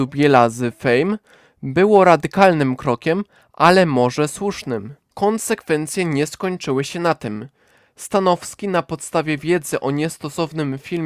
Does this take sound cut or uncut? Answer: cut